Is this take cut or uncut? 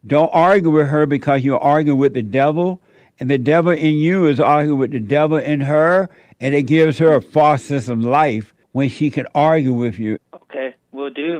cut